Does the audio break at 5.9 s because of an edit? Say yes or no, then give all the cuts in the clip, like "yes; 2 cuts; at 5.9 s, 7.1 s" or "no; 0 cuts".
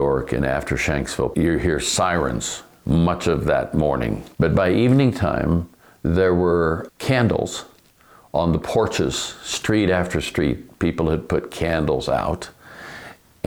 no; 1 cut; at 1.3 s